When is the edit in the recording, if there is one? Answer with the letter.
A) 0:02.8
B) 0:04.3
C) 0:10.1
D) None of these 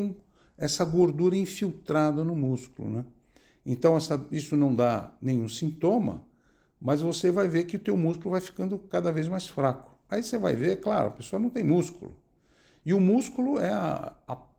C